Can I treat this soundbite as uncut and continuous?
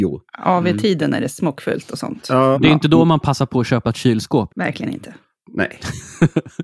no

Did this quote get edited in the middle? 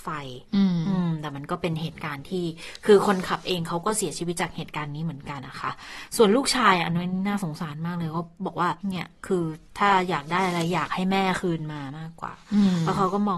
yes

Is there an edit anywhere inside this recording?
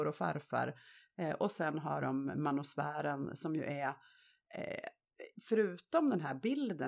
no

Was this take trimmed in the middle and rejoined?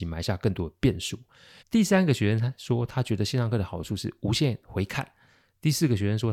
yes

